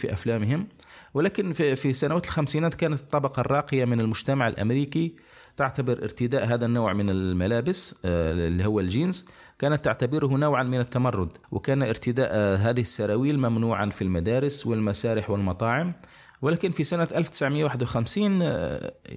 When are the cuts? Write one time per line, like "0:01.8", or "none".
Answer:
0:11.4